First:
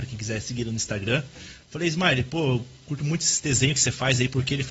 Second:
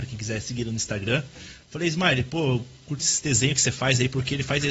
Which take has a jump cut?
second; 1 cut; at 3.0 s

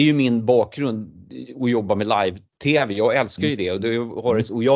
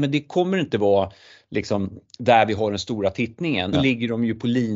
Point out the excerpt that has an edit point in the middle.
second; 1 cut; at 3.7 s

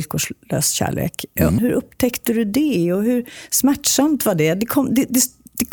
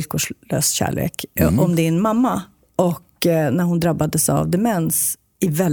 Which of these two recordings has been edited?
first; 1 cut; at 1.6 s

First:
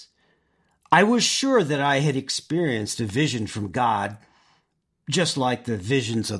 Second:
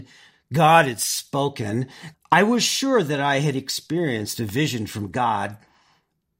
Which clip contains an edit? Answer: second; 1 cut; at 2.1 s

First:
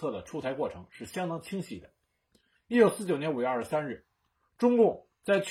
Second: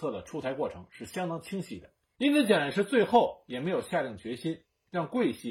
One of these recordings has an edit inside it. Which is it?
second; 1 cut; at 2.2 s

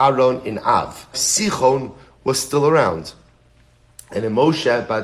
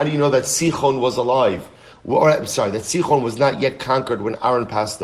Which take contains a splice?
first; 1 cut; at 1.1 s

